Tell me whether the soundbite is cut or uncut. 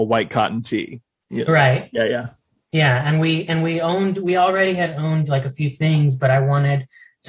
uncut